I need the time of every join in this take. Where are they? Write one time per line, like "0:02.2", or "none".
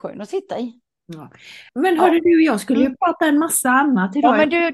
0:01.7